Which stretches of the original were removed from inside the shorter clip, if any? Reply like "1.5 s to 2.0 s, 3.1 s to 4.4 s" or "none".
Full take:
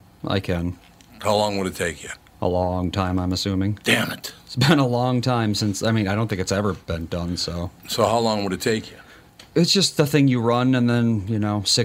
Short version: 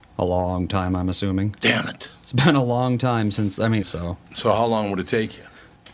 6.1 s to 7.4 s